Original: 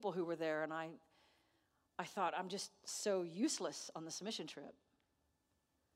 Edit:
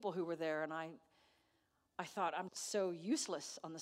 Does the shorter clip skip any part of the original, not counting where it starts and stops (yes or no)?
yes